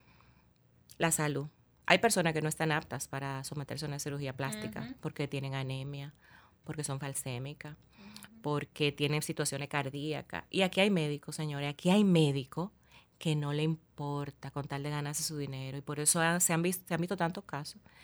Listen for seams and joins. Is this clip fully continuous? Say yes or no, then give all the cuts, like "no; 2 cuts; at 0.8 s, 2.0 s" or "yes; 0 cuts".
yes; 0 cuts